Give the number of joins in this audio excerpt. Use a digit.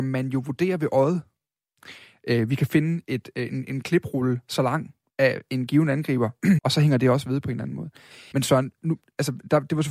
2